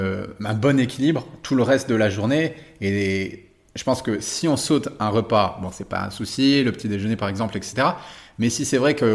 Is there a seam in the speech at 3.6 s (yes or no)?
no